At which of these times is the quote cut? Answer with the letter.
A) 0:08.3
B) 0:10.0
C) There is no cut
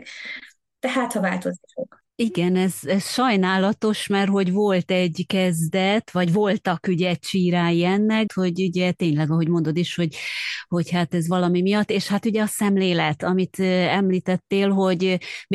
A